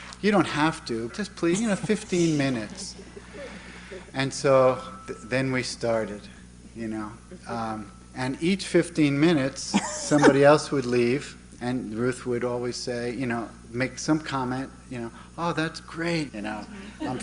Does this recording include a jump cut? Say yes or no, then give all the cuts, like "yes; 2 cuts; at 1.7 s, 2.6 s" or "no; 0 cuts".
yes; 3 cuts; at 1.1 s, 11.6 s, 16.3 s